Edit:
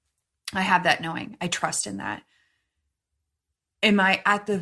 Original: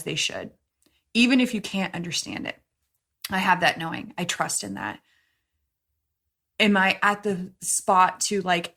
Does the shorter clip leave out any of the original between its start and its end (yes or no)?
no